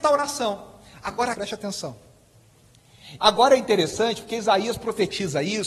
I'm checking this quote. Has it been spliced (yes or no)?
yes